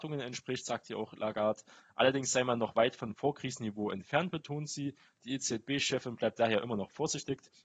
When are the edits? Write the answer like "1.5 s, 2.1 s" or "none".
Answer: none